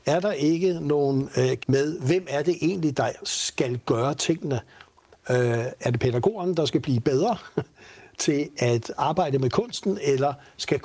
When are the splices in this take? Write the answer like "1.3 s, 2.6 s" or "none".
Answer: 1.6 s